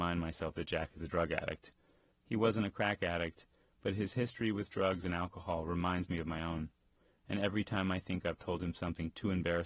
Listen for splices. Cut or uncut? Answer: cut